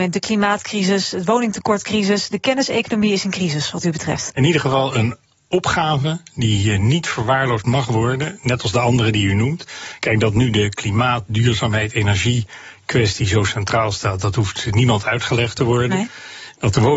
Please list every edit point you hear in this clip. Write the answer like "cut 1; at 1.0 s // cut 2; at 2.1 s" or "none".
none